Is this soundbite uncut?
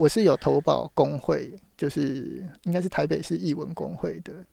yes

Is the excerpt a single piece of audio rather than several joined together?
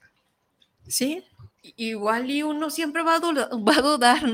no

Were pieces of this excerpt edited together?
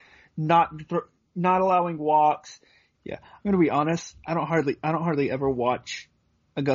yes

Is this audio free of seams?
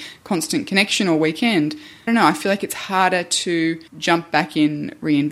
no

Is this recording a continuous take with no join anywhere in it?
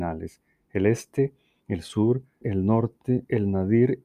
no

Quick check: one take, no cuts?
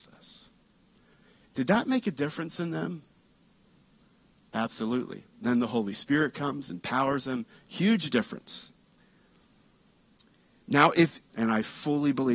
no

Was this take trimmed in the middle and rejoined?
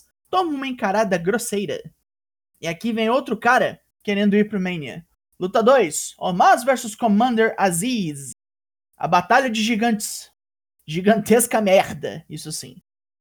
no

